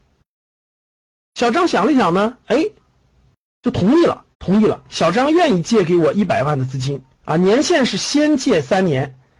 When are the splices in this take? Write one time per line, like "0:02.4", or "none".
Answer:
0:04.3
0:07.1